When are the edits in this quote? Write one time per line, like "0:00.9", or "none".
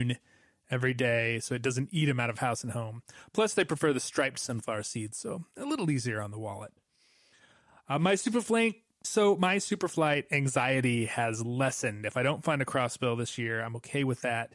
none